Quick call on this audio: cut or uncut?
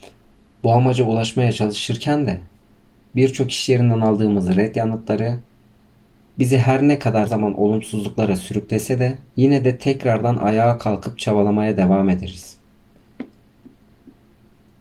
cut